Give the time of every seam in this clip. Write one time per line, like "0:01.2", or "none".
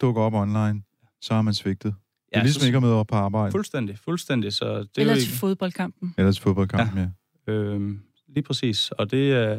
none